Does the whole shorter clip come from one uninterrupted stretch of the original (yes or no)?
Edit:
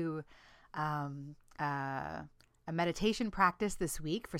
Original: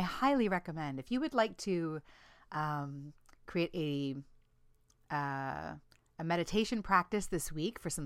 no